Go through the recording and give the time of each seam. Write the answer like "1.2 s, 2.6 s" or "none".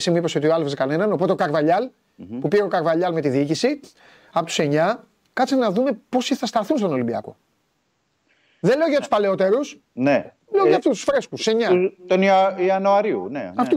none